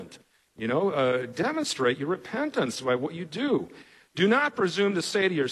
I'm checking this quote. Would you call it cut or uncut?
uncut